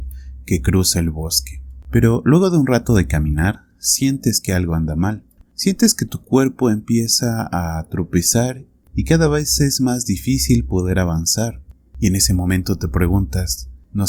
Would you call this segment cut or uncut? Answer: cut